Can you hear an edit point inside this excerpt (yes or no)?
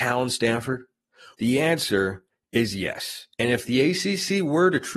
yes